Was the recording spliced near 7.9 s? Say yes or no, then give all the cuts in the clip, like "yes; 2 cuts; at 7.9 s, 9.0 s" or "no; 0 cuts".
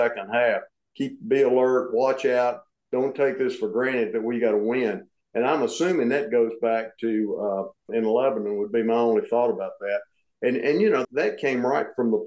yes; 2 cuts; at 7.9 s, 11.0 s